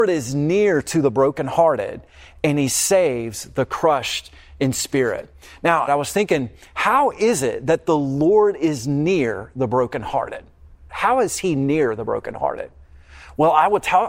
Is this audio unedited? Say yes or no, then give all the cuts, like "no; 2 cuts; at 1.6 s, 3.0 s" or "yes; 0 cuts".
no; 2 cuts; at 5.9 s, 10.9 s